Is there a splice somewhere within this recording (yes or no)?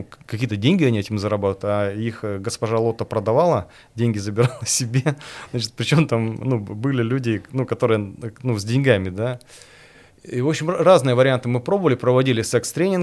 no